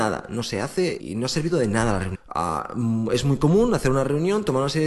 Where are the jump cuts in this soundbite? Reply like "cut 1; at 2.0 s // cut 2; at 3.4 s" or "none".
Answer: cut 1; at 1.0 s // cut 2; at 2.1 s